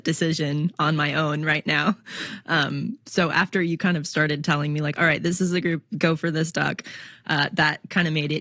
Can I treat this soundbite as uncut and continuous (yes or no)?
yes